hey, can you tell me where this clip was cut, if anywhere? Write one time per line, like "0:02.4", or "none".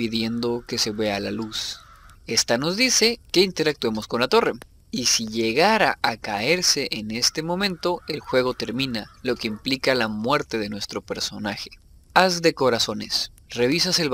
0:02.1

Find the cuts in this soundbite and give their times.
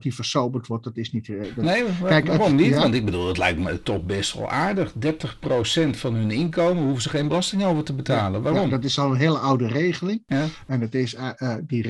none

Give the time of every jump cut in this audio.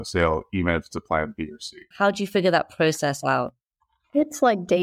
0:01.9

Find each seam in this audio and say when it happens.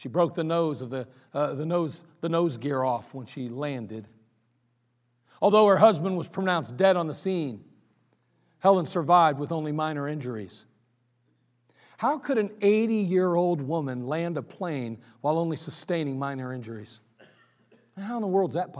none

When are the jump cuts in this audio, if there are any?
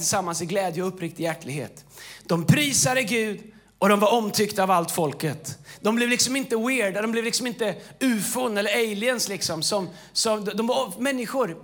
none

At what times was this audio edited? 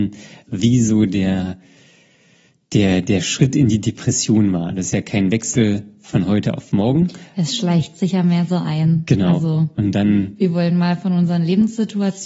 none

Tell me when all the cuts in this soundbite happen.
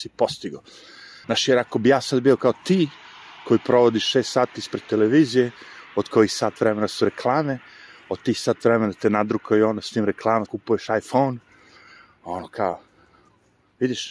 0:01.2
0:10.5

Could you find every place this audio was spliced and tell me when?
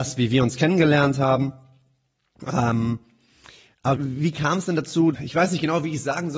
0:03.9
0:05.1

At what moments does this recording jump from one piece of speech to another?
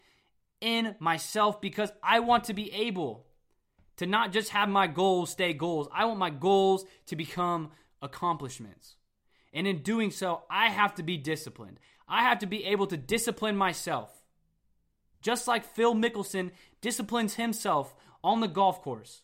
none

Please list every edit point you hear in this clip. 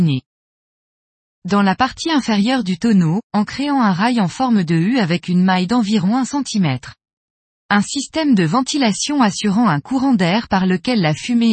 0:03.3
0:07.5

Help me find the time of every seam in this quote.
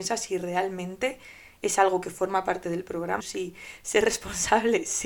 0:03.2

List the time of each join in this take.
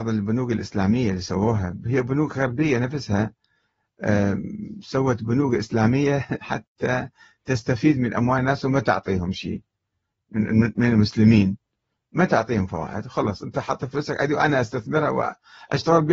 none

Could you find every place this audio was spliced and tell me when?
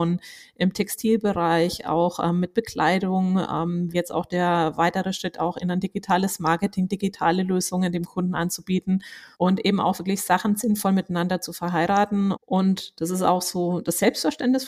0:03.9
0:09.3
0:12.3

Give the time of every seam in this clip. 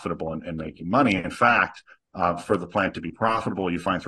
none

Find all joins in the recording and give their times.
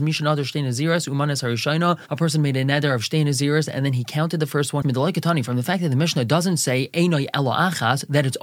0:04.8

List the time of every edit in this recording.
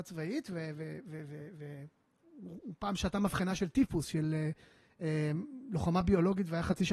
none

